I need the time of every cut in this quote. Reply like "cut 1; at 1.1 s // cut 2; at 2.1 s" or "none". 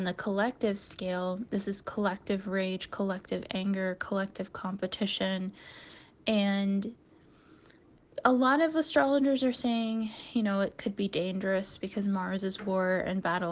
none